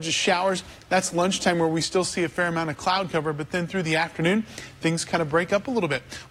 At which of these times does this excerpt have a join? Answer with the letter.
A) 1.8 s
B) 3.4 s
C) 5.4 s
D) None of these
D